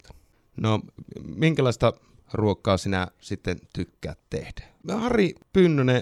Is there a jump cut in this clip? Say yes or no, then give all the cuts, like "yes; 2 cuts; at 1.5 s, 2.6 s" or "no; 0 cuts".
yes; 1 cut; at 4.8 s